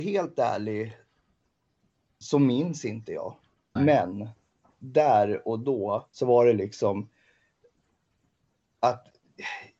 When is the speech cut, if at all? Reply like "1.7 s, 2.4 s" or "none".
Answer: 3.8 s, 6.1 s